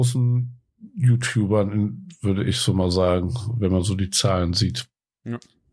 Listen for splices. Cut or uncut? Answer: uncut